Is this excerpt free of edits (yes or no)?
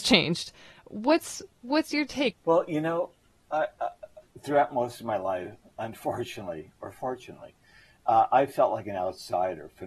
no